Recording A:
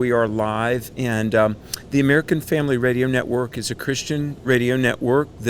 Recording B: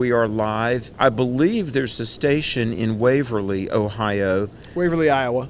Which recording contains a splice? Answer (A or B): B